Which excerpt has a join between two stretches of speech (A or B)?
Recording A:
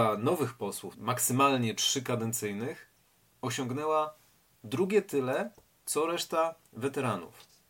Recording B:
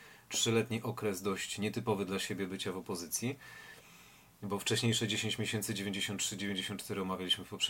A